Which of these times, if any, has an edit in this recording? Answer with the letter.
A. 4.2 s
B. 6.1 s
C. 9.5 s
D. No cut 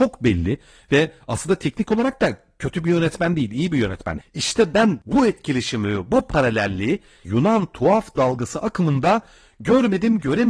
A